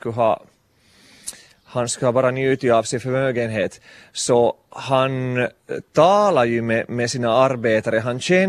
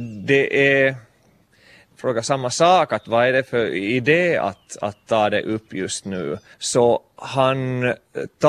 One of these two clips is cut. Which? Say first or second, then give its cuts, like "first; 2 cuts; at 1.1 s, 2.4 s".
second; 2 cuts; at 1.9 s, 6.5 s